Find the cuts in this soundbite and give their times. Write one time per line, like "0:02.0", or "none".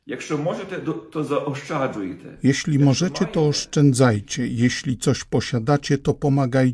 none

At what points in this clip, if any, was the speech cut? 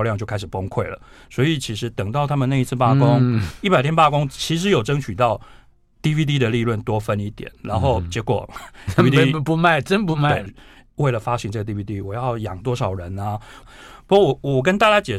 0:10.5
0:13.6

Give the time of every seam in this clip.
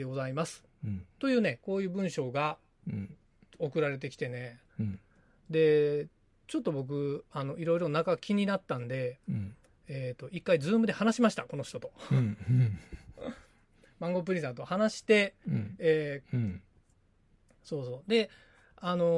0:01.1
0:16.2

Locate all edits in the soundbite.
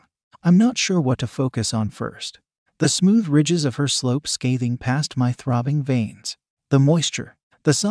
0:06.6

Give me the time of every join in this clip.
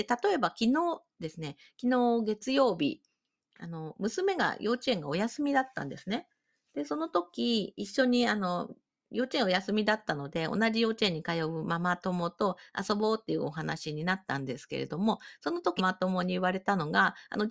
0:15.8

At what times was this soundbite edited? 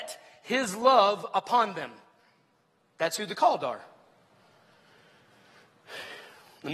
none

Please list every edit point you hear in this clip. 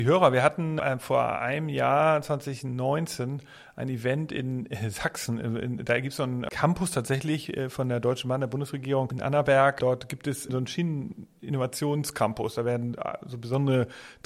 none

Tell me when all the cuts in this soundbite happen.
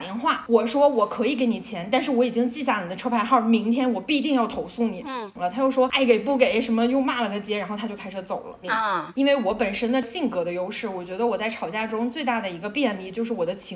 0:08.6

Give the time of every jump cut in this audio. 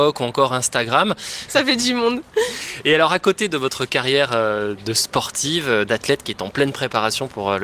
0:01.5

